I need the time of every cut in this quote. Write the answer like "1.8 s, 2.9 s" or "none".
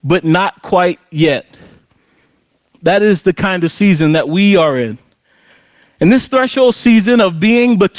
none

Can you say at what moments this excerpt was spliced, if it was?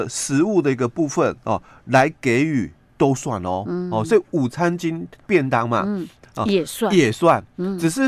none

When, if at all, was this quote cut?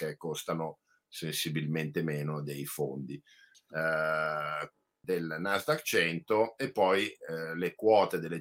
3.5 s, 5.0 s

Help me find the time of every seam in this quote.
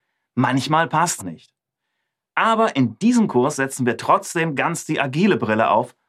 1.2 s

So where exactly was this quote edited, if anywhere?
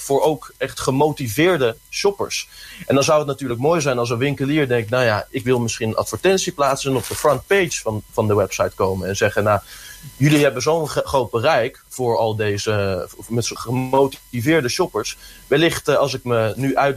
13.6 s

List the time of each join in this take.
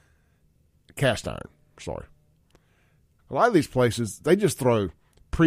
3.2 s

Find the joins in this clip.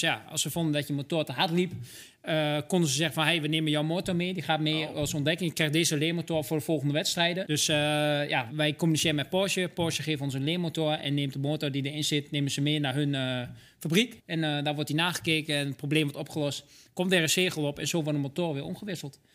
7.4 s, 14.2 s

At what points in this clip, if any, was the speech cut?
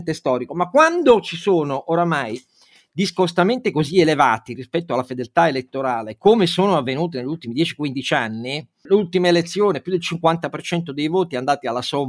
8.9 s

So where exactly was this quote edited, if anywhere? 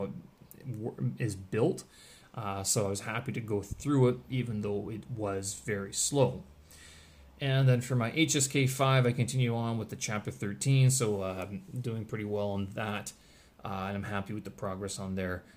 none

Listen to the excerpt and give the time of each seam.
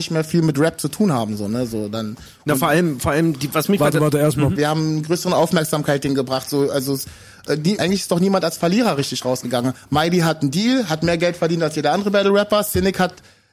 4.6 s, 7.8 s

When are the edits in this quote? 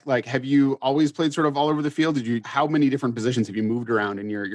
2.4 s

